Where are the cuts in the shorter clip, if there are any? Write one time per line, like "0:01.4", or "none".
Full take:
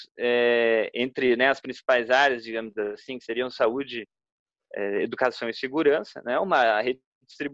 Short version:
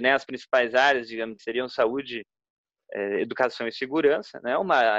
0:01.4